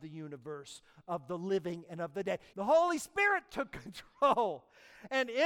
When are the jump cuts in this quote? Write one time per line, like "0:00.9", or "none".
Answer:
0:02.5